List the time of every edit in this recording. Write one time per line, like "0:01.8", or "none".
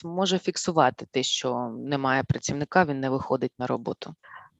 none